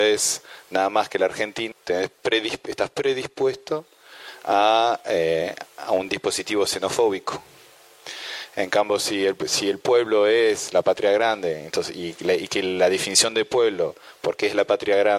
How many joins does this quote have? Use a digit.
1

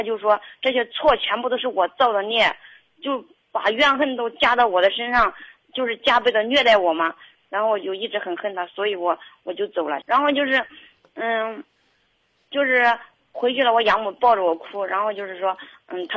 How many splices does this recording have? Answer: 2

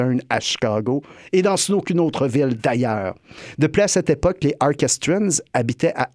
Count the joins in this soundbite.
0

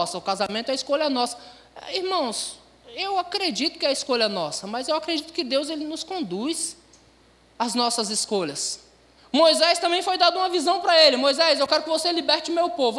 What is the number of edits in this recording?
1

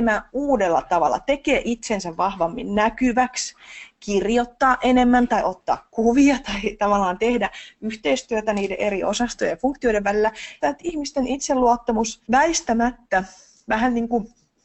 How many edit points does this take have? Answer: 2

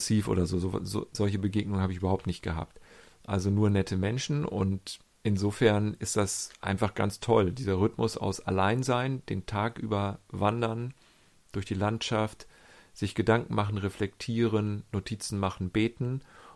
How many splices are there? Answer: 1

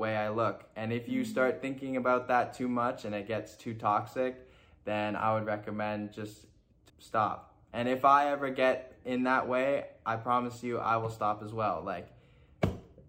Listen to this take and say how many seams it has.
1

